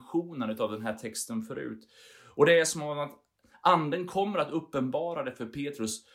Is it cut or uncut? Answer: uncut